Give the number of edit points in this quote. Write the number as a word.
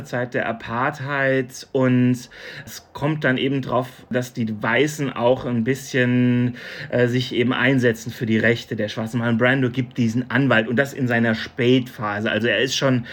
zero